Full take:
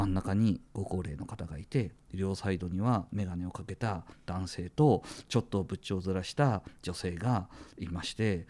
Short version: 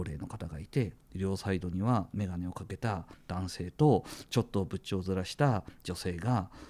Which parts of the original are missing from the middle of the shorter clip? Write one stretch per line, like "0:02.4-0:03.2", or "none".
none